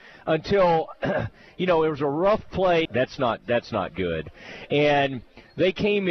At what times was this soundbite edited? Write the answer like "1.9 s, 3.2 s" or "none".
2.9 s